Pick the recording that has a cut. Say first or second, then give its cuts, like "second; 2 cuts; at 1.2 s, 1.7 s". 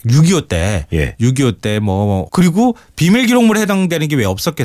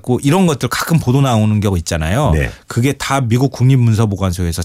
first; 1 cut; at 2.3 s